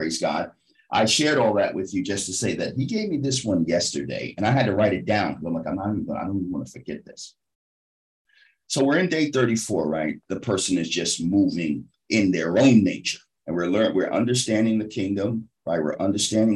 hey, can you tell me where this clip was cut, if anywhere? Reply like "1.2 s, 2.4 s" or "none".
10.2 s, 13.4 s